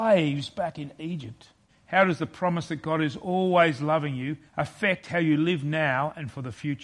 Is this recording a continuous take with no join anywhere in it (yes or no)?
no